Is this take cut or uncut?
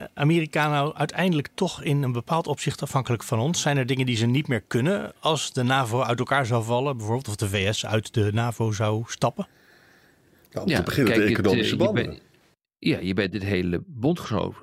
uncut